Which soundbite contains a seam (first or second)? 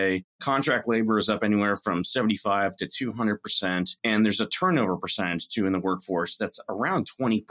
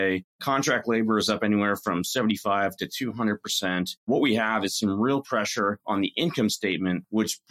second